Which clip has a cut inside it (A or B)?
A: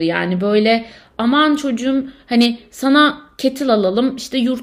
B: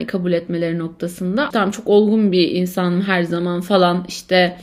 B